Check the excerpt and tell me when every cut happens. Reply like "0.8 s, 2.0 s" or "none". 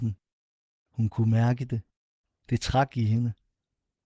none